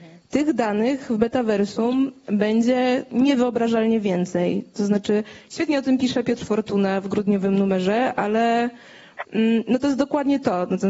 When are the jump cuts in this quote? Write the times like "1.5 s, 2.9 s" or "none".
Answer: none